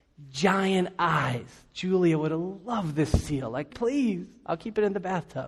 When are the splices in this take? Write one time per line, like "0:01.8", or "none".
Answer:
0:03.7